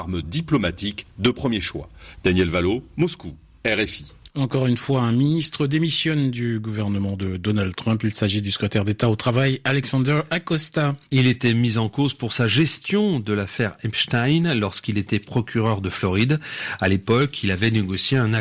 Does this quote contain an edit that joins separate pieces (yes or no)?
no